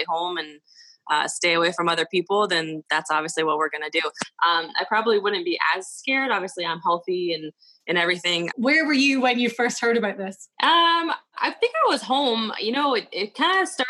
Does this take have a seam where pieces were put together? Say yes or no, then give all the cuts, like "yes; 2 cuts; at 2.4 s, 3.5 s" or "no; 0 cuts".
yes; 2 cuts; at 8.5 s, 10.5 s